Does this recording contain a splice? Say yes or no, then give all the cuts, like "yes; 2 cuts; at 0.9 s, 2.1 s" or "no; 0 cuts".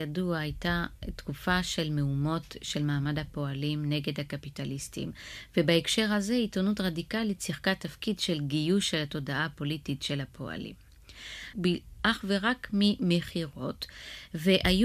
yes; 1 cut; at 11.5 s